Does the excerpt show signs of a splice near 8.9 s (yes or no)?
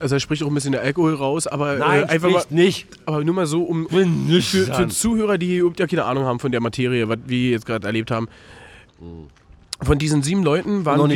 yes